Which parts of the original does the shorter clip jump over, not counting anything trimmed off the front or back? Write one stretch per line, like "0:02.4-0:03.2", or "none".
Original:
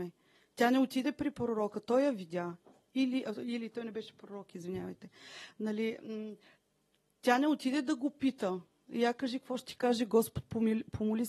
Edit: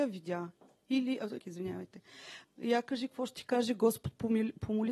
0:03.4-0:04.5
0:05.5-0:08.8